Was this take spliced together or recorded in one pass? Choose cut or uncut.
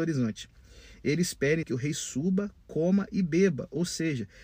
cut